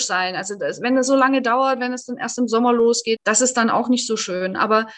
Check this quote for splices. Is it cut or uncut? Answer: cut